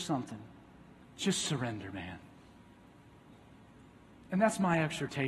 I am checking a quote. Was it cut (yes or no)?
yes